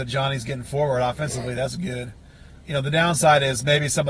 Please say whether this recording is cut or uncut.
cut